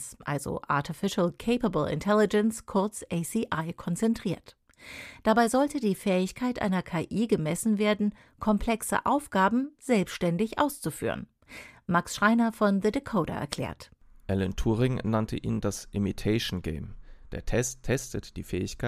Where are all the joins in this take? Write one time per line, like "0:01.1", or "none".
none